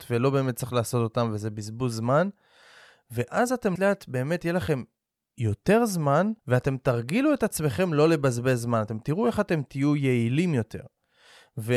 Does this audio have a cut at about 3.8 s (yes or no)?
yes